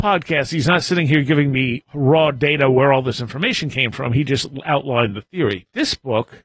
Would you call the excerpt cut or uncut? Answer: uncut